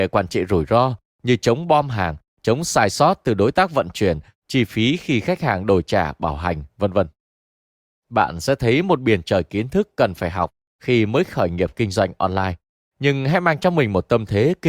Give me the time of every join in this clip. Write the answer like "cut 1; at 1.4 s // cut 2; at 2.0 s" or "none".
none